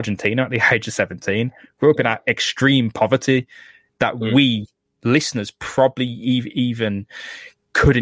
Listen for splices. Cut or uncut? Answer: uncut